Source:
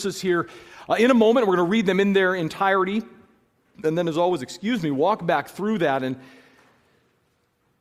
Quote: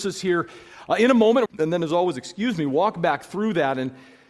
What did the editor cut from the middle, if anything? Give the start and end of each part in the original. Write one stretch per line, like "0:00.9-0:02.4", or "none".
0:01.5-0:03.7